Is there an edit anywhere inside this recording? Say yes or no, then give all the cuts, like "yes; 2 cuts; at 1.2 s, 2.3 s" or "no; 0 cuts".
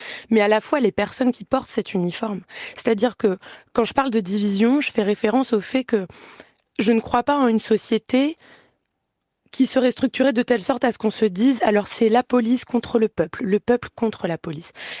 no; 0 cuts